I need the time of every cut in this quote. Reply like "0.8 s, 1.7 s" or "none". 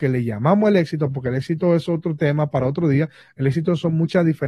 none